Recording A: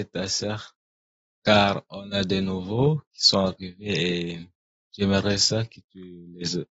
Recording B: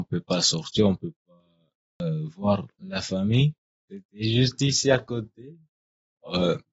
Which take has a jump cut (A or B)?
B